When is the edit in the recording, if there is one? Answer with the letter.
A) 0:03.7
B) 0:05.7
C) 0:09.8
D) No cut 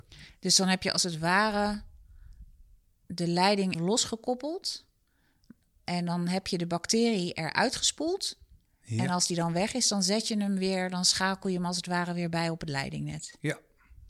A